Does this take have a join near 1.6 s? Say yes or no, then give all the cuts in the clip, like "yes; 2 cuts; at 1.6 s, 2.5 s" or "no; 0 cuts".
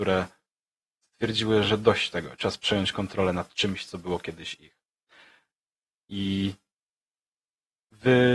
no; 0 cuts